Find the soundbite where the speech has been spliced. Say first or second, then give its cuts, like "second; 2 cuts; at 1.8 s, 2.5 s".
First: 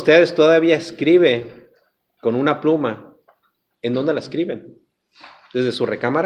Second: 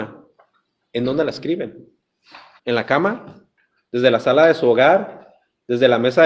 second; 1 cut; at 2.6 s